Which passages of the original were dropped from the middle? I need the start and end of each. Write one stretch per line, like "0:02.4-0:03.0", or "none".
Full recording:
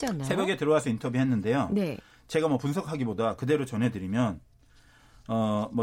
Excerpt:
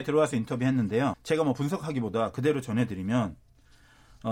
0:01.7-0:02.2